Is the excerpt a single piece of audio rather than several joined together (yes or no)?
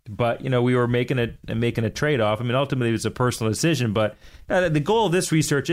yes